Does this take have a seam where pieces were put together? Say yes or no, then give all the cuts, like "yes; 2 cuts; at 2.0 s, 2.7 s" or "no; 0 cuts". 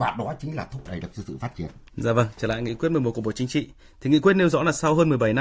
no; 0 cuts